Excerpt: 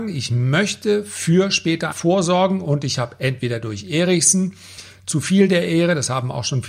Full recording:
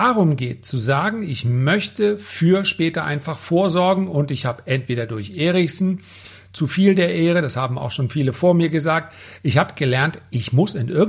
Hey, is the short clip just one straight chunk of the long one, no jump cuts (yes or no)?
no